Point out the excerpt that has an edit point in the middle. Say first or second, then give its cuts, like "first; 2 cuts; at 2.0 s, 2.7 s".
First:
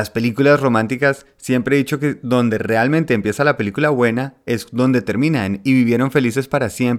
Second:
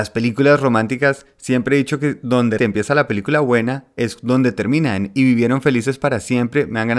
second; 1 cut; at 2.6 s